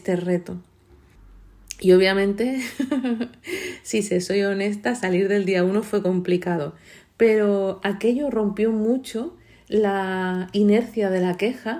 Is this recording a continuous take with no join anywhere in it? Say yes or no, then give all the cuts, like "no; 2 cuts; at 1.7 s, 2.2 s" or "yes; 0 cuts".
yes; 0 cuts